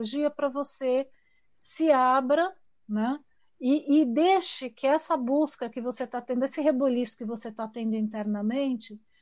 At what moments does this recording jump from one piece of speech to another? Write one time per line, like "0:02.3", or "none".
none